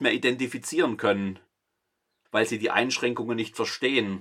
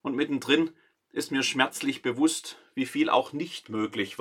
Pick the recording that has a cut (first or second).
first